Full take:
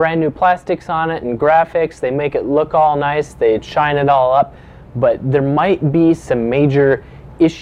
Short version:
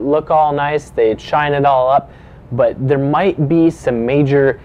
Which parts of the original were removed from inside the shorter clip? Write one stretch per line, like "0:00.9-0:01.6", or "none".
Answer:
none